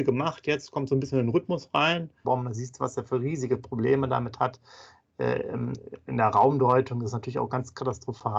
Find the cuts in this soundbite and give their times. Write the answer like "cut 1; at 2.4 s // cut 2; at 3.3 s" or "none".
cut 1; at 2.2 s